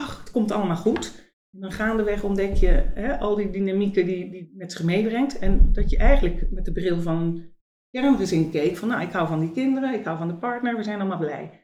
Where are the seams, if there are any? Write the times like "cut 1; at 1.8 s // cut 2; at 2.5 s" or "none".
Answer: none